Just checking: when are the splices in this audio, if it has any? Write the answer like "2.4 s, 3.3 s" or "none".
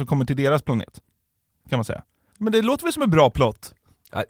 2.3 s